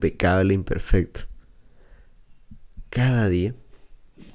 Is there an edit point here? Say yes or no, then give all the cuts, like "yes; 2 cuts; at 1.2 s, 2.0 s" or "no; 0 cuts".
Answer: no; 0 cuts